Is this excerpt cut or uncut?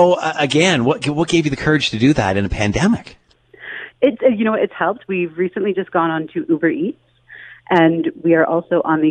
cut